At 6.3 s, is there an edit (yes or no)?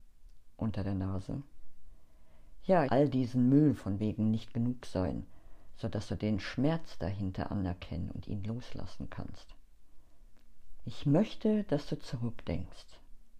no